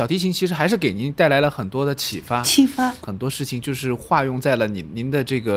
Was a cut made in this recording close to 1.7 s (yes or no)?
no